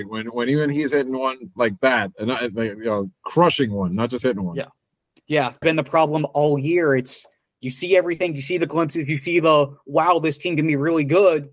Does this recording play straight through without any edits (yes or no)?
no